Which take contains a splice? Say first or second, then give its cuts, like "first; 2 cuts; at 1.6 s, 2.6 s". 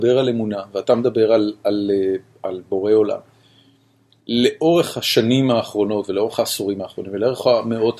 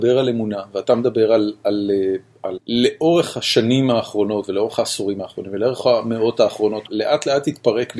second; 2 cuts; at 2.6 s, 6.9 s